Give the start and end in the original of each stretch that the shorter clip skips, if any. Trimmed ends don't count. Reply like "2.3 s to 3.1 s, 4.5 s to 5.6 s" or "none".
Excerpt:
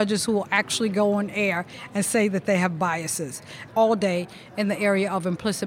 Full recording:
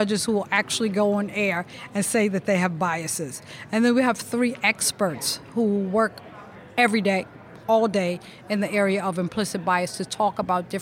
3.7 s to 7.6 s